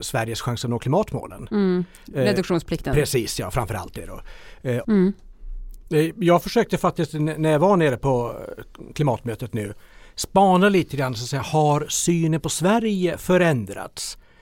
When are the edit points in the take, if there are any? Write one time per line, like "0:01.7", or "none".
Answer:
0:04.8